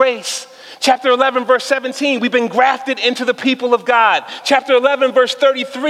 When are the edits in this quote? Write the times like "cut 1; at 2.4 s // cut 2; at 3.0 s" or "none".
cut 1; at 4.4 s